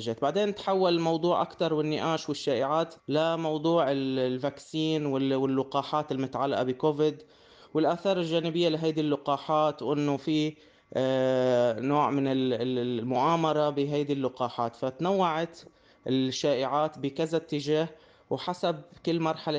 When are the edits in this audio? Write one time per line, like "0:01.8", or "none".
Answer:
0:03.0

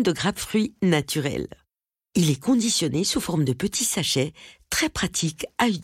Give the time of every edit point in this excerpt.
none

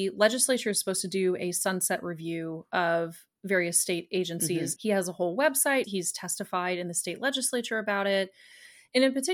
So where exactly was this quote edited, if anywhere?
0:04.8
0:05.8

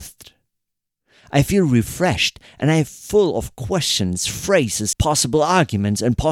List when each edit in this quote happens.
0:04.9

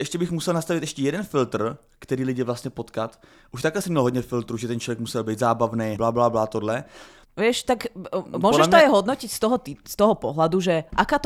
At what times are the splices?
0:06.0
0:07.2

